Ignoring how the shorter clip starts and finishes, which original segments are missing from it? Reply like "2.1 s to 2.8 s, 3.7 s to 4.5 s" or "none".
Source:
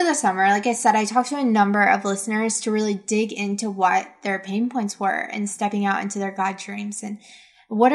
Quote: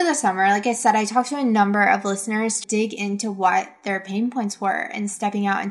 2.6 s to 3.0 s